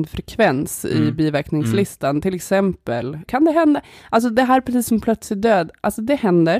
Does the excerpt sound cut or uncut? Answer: cut